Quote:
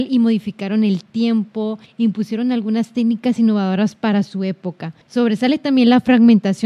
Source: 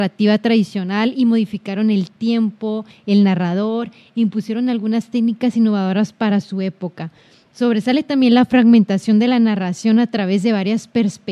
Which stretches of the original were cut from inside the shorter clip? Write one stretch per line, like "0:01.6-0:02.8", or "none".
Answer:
0:02.9-0:04.0
0:07.2-0:07.5